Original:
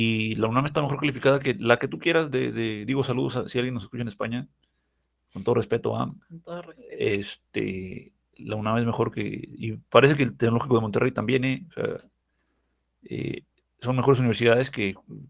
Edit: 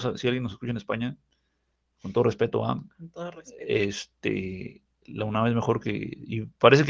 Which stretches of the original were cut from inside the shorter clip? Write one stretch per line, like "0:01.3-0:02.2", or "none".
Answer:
none